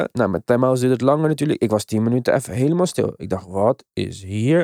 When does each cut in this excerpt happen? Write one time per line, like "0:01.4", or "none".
none